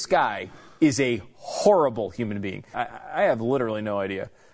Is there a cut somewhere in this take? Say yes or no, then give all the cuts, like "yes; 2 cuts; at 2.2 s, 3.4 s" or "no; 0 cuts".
yes; 1 cut; at 2.7 s